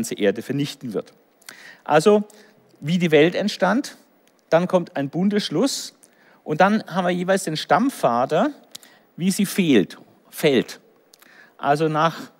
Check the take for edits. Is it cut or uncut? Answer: cut